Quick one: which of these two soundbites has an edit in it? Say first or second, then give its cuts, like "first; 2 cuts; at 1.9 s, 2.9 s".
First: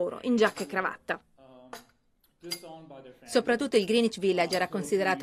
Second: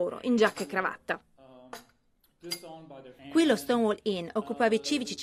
second; 1 cut; at 3.2 s